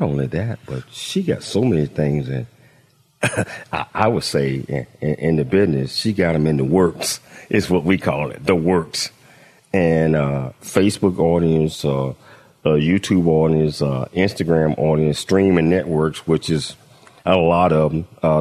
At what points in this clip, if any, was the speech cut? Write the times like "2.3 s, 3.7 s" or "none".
none